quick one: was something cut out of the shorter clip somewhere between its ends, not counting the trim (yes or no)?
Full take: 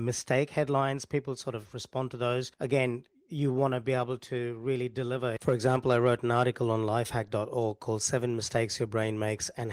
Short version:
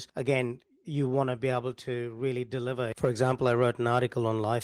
no